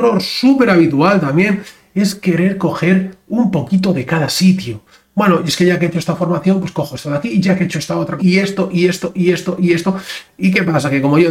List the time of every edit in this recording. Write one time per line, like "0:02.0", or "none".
0:08.2
0:10.3